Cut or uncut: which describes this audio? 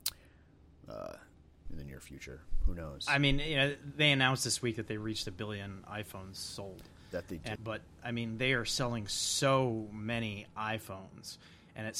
cut